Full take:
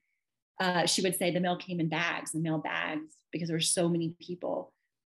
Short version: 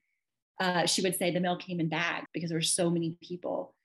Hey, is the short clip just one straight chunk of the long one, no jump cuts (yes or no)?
no